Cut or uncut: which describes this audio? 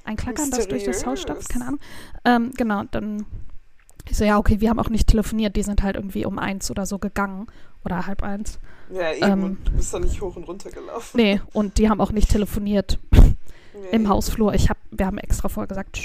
uncut